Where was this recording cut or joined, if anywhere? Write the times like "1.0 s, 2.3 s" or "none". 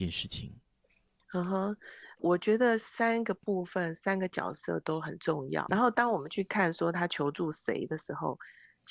2.2 s, 5.7 s